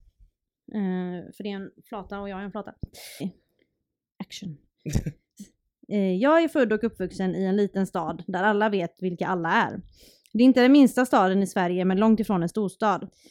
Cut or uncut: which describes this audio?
cut